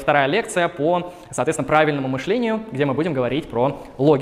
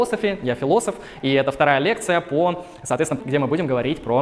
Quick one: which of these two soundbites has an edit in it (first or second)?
second